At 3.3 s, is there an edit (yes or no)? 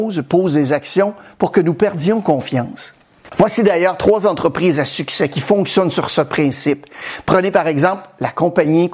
yes